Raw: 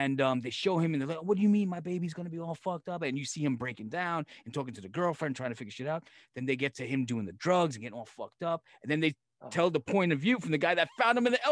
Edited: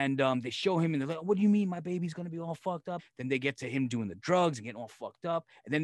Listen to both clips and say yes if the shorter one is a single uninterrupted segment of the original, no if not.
no